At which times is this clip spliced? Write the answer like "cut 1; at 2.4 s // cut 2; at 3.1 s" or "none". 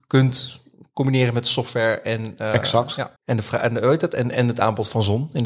cut 1; at 3.2 s